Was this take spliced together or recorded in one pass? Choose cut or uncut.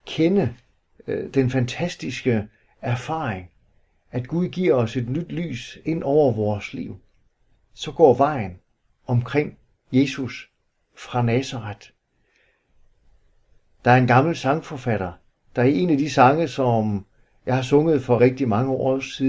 cut